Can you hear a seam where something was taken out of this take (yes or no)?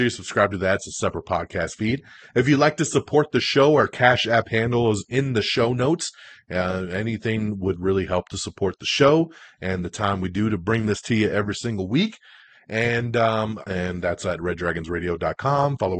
yes